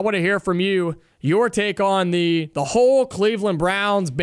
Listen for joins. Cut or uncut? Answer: uncut